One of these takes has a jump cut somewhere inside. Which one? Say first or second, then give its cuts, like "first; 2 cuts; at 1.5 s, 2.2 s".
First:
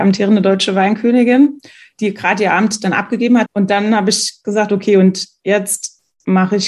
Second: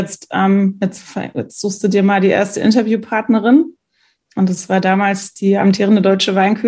first; 1 cut; at 3.5 s